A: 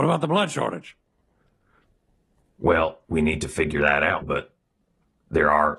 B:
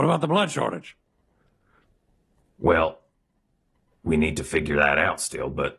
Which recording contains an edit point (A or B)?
A